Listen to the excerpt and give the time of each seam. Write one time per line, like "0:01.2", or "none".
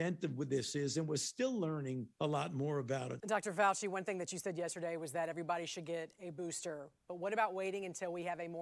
0:02.1
0:03.2